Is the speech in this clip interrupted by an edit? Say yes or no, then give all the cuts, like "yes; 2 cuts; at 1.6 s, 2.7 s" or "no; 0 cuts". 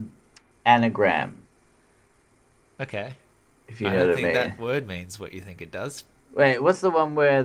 no; 0 cuts